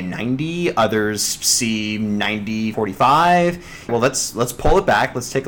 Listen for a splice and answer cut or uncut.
cut